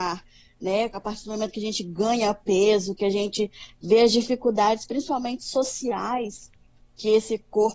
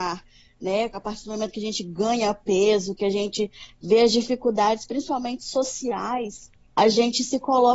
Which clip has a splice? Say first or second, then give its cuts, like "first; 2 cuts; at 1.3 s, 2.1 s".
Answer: second; 1 cut; at 6.7 s